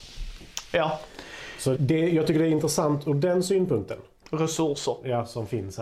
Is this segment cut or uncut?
cut